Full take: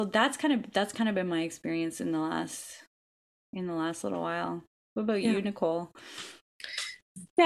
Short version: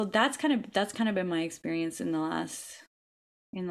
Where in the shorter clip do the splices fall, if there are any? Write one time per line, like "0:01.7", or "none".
none